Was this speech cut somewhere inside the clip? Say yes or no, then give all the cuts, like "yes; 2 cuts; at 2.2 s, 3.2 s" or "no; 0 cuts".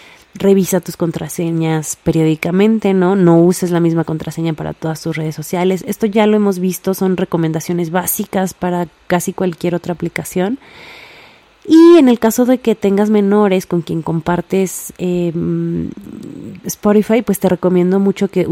no; 0 cuts